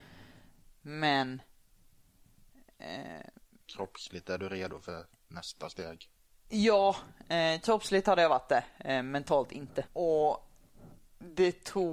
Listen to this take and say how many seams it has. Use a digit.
1